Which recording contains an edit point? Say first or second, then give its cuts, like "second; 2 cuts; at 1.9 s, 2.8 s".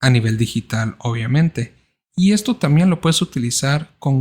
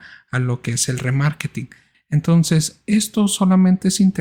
second; 1 cut; at 1.9 s